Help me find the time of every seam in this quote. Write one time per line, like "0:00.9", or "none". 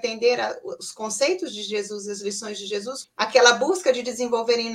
0:03.0